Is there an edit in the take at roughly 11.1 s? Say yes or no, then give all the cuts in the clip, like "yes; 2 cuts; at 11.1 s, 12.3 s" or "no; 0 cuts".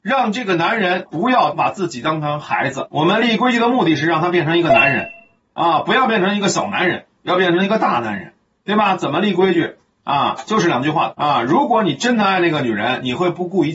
yes; 1 cut; at 11.1 s